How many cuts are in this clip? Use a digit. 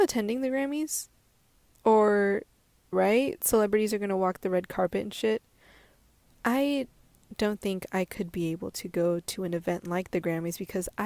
2